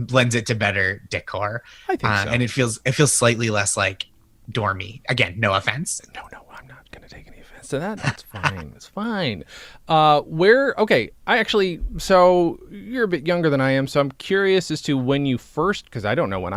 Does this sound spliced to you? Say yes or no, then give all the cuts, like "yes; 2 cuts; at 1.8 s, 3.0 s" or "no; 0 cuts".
yes; 1 cut; at 8.0 s